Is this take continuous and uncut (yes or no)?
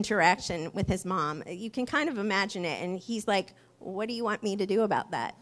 yes